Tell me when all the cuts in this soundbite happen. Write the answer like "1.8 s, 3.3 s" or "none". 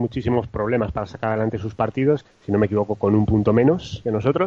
2.3 s